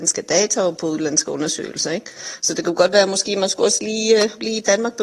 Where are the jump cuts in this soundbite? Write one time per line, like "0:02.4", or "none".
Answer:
none